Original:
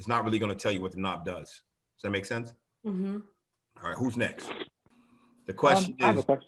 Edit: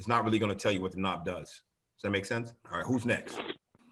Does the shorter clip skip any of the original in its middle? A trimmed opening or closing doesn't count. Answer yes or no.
yes